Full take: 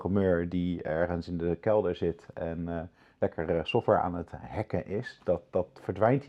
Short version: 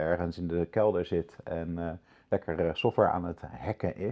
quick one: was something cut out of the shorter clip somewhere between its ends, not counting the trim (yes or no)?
no